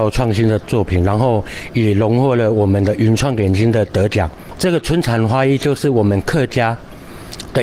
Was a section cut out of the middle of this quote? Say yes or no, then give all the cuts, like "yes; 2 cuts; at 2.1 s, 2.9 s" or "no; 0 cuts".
yes; 1 cut; at 4.6 s